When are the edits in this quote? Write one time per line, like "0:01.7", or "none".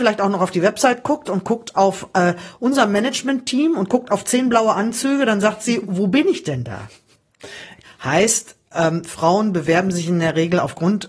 0:07.8